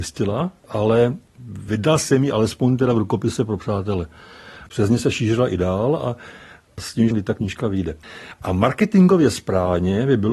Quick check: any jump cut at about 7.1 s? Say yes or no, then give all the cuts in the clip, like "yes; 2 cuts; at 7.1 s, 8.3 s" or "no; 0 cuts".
yes; 1 cut; at 7.1 s